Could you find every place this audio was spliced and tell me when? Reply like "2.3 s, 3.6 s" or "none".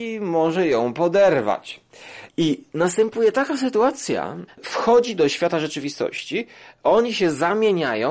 2.3 s, 4.5 s